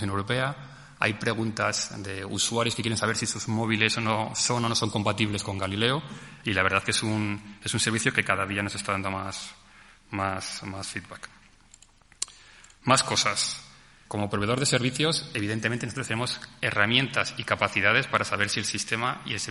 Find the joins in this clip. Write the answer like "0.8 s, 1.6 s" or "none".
14.1 s